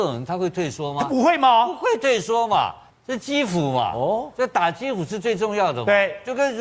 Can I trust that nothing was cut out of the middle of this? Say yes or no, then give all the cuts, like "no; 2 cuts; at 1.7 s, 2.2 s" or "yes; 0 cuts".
no; 1 cut; at 2.9 s